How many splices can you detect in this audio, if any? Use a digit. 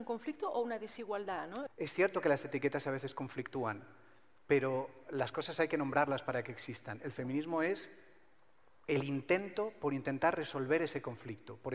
1